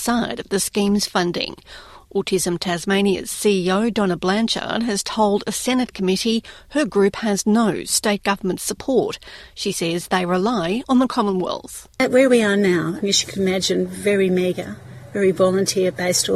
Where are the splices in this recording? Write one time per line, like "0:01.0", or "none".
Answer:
0:13.0